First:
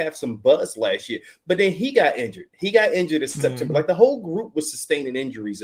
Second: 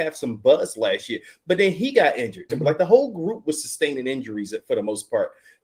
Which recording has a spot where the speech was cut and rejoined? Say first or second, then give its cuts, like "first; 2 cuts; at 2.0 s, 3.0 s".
second; 1 cut; at 2.5 s